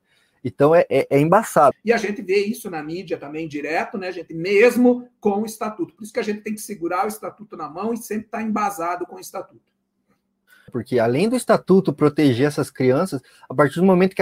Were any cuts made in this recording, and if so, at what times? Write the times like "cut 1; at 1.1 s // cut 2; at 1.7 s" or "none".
cut 1; at 1.7 s // cut 2; at 10.7 s